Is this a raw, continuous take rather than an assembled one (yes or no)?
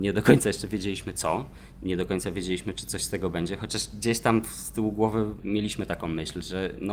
yes